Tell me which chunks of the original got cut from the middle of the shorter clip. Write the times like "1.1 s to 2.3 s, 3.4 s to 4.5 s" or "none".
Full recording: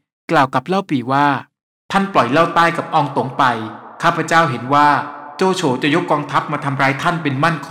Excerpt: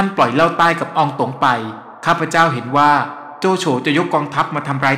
none

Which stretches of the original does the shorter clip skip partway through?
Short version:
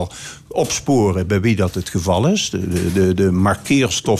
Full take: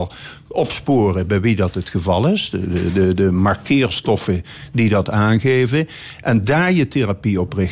none

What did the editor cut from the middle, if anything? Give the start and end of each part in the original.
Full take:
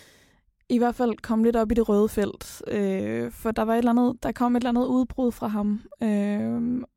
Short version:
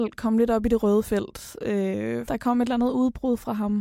3.3 s to 4.2 s

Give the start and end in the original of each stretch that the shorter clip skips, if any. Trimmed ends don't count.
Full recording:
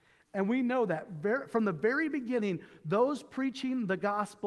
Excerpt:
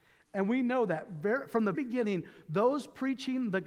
1.7 s to 2.1 s

